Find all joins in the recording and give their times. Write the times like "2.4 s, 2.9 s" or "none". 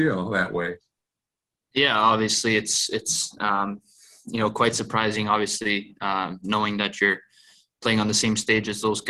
none